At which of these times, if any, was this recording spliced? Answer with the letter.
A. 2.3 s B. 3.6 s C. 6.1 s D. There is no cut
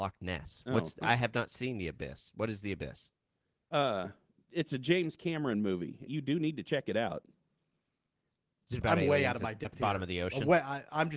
C